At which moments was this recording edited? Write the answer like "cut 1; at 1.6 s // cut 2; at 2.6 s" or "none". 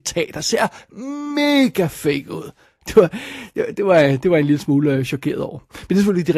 cut 1; at 2.8 s